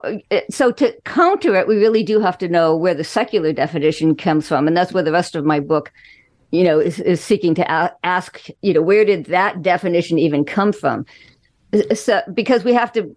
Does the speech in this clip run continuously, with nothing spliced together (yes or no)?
yes